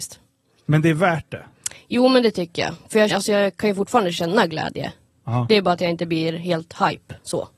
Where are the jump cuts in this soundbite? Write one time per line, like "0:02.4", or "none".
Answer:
0:03.1